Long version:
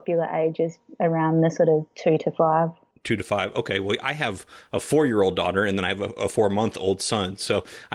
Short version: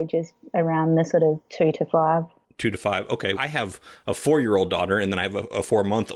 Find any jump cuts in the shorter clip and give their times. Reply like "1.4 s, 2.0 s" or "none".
3.4 s